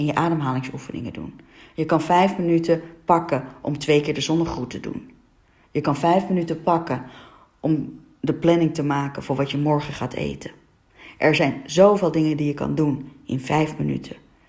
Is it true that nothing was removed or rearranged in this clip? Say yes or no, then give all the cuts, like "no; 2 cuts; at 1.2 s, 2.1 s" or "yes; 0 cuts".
yes; 0 cuts